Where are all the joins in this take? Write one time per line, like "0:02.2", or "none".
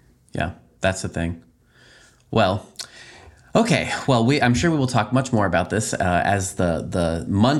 none